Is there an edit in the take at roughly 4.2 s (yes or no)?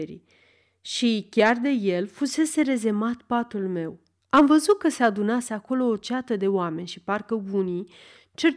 yes